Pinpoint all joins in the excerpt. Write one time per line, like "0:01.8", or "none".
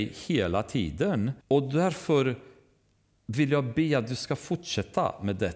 0:01.4